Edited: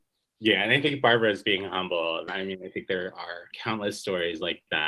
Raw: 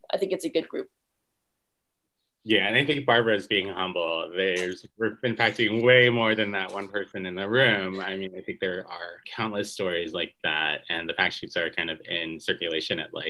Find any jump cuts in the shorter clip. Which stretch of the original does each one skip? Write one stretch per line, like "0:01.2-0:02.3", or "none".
0:04.3-0:08.0

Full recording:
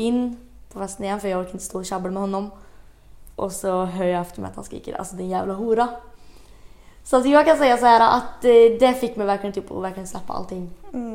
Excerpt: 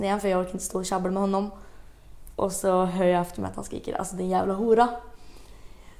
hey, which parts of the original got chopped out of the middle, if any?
none

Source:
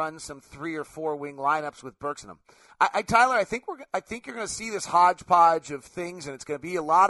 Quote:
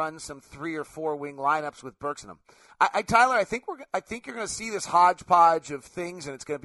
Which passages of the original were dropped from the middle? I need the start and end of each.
none

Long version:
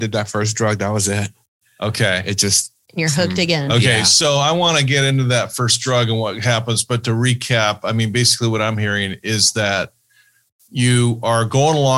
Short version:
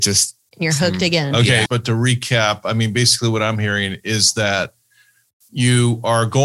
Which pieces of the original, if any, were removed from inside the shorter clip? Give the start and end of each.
0:04.0-0:06.8

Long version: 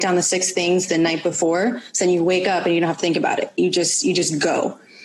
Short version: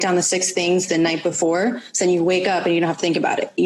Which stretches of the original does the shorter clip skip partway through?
none

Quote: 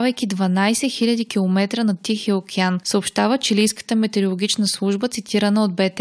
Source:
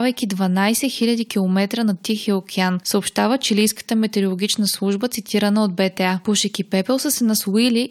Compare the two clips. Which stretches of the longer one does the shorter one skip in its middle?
none

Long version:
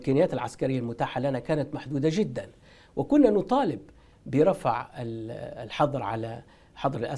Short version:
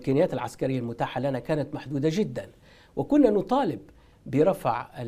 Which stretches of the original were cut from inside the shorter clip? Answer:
none

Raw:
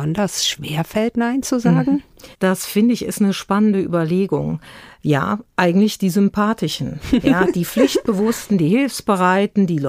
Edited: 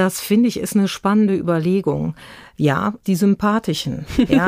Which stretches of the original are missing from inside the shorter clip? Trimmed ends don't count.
0:05.5-0:06.0

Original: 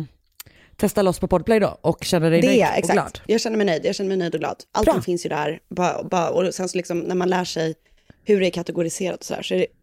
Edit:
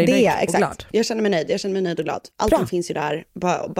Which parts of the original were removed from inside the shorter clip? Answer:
none

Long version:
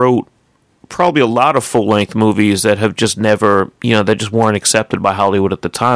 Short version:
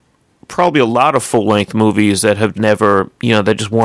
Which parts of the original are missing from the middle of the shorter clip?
0:02.9-0:03.1

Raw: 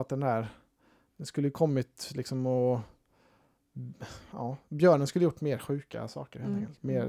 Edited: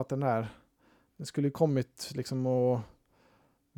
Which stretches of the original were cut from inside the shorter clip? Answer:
none

